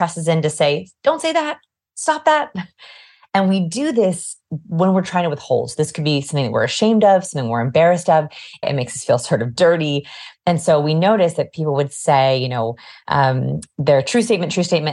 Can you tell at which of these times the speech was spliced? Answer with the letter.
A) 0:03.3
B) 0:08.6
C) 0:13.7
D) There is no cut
B